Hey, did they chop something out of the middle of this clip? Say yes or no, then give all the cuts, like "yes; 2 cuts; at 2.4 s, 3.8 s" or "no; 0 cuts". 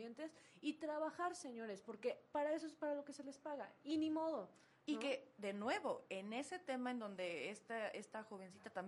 no; 0 cuts